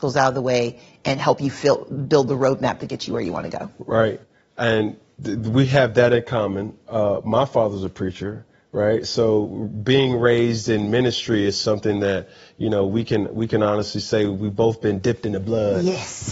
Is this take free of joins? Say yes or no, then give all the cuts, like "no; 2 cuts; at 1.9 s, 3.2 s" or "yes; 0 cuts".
yes; 0 cuts